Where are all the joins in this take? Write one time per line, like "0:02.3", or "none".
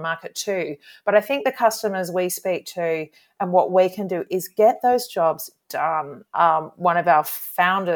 none